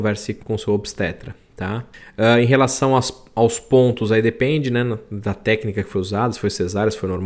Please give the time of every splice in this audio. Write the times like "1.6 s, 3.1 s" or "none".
none